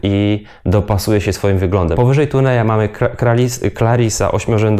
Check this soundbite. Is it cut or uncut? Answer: cut